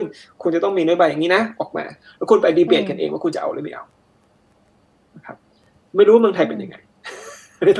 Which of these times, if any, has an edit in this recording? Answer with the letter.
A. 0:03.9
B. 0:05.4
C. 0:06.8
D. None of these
D